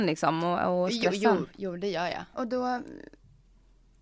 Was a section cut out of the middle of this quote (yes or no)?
yes